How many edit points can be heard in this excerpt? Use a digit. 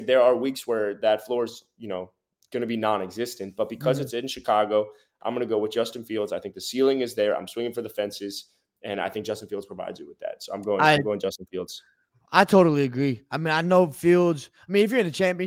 0